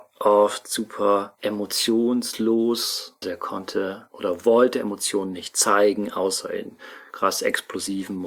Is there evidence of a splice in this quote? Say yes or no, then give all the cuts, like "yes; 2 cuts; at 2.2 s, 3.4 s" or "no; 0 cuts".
yes; 1 cut; at 3.2 s